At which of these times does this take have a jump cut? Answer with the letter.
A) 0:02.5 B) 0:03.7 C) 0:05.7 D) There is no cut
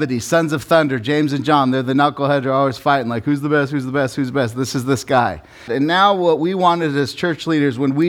C